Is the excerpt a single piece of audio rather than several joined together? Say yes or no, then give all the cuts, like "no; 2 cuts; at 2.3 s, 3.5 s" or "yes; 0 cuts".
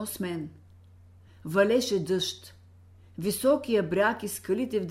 no; 1 cut; at 1.3 s